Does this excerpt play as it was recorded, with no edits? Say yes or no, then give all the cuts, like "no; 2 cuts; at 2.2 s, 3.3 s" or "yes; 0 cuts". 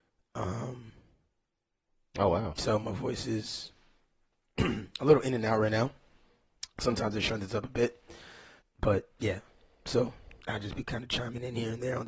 no; 2 cuts; at 8.6 s, 10.4 s